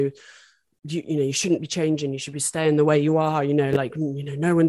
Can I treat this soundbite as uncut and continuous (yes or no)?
no